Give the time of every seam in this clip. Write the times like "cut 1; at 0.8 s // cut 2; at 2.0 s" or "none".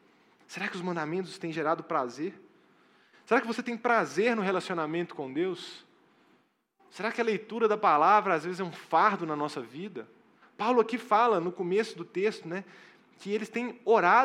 cut 1; at 10.4 s